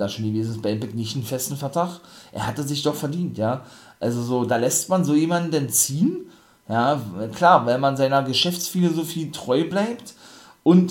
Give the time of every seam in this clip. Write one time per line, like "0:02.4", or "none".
none

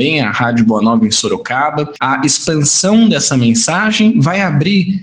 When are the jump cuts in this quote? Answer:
0:02.0

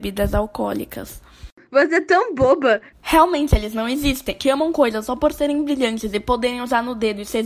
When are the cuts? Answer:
0:02.9
0:04.4

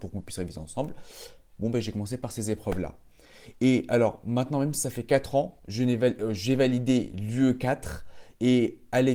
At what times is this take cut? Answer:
none

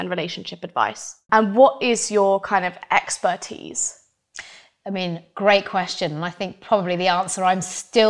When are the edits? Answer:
0:01.3

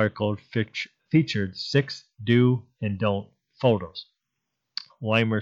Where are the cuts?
0:01.1

